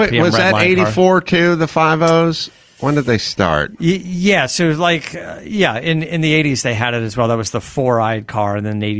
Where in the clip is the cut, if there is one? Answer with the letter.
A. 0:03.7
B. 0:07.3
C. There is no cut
C